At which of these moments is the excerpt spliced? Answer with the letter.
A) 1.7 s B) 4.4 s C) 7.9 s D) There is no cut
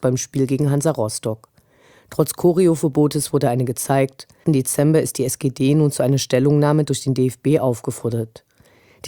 B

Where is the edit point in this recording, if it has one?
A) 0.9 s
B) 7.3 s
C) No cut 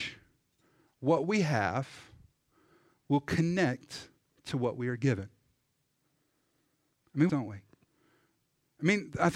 B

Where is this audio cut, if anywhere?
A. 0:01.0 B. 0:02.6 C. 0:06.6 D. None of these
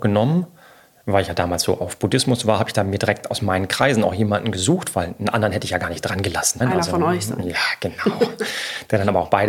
C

